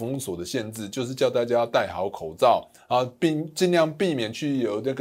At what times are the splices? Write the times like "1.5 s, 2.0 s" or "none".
none